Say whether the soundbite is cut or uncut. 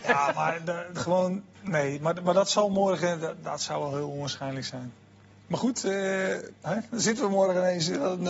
cut